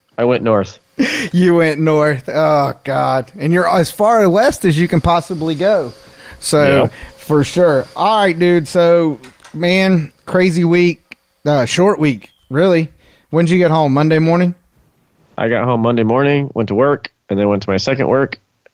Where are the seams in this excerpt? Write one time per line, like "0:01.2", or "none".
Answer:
none